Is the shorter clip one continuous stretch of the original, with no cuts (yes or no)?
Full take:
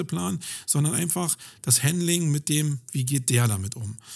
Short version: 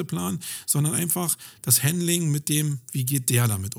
yes